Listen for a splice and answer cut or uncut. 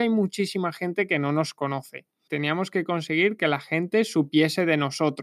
cut